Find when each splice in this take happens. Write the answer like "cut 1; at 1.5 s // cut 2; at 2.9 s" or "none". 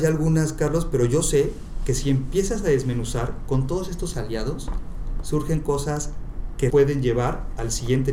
cut 1; at 6.7 s